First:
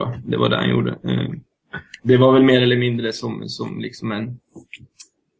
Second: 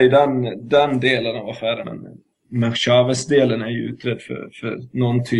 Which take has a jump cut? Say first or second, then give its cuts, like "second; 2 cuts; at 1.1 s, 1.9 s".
second; 1 cut; at 1.8 s